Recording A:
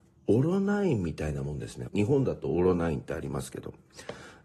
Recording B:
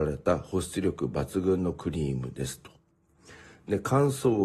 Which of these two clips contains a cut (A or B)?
A